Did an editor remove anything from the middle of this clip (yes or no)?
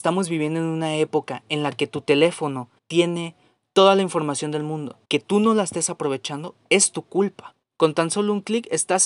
yes